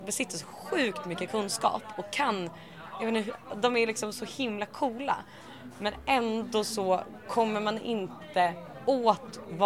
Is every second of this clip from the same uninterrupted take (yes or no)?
yes